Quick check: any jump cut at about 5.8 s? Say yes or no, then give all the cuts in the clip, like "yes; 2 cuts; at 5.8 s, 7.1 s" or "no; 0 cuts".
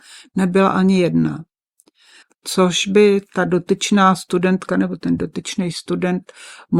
no; 1 cut; at 2.2 s